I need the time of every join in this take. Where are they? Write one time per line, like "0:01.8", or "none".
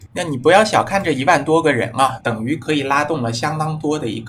0:02.2